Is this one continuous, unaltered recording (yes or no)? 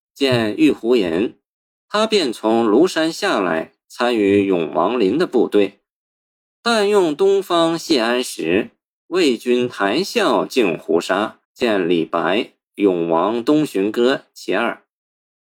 no